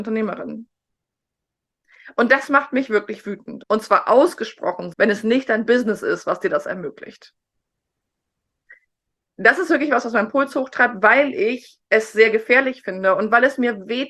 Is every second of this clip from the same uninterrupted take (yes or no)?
no